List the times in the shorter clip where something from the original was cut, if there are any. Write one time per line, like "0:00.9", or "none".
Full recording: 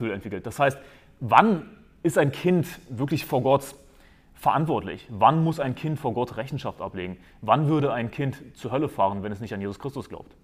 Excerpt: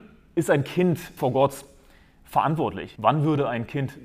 0:01.2
0:03.0

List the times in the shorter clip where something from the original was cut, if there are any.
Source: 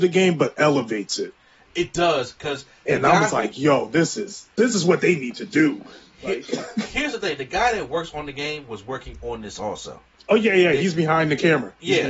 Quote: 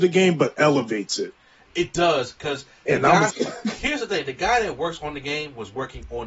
0:03.3

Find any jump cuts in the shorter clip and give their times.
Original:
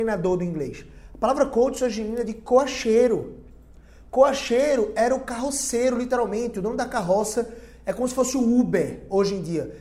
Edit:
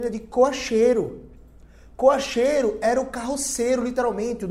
none

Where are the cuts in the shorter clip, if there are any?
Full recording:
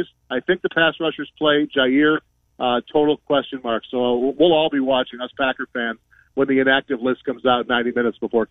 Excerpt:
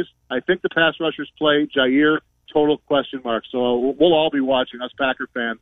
0:02.5

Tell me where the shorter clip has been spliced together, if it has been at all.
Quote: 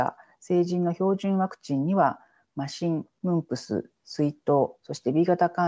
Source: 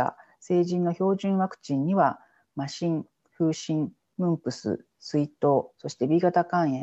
0:03.1

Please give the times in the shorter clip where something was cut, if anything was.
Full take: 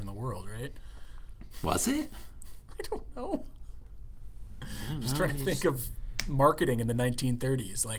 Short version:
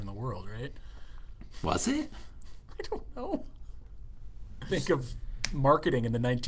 0:04.7

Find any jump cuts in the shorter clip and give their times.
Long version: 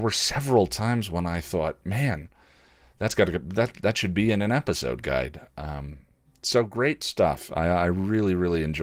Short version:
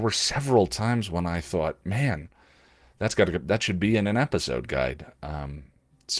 0:03.5

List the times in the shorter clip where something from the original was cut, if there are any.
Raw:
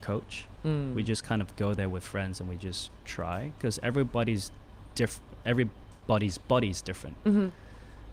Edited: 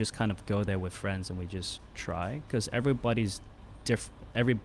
none

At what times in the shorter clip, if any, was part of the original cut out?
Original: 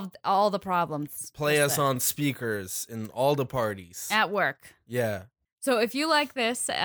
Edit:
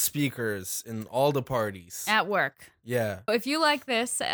0:03.3

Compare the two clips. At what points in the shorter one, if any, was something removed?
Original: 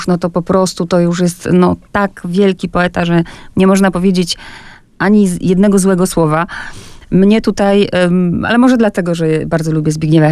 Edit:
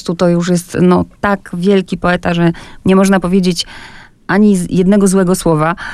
none

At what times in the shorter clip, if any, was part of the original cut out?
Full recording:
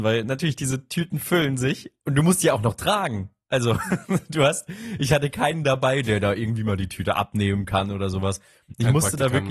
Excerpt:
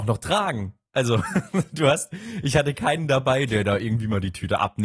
none

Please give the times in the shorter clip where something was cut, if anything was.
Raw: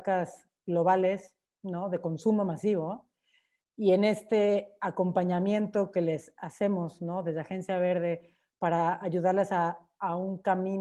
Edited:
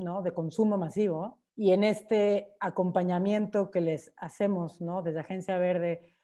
0:01.5

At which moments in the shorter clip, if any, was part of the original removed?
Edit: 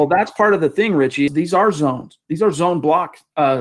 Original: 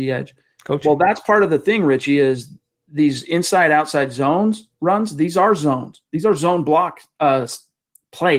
0:01.3

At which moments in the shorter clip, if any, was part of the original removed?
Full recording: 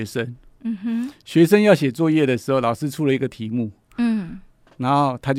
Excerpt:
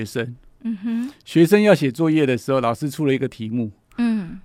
none

